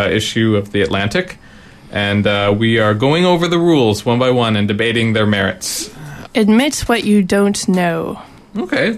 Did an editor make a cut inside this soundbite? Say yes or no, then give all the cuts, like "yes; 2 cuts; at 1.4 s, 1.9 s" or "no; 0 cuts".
yes; 1 cut; at 6.3 s